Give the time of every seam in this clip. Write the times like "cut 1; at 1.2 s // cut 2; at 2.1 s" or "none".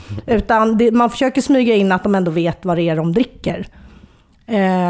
none